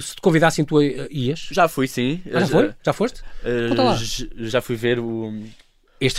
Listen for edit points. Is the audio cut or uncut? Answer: uncut